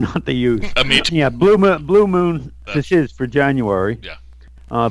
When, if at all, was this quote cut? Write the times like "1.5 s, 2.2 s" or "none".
1.1 s, 2.7 s